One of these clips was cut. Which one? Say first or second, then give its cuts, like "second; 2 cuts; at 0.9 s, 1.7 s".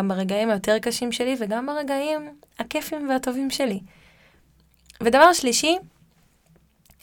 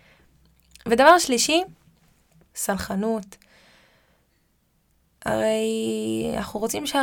second; 1 cut; at 2.5 s